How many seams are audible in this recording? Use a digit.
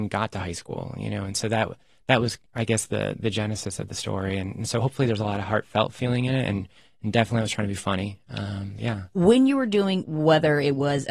2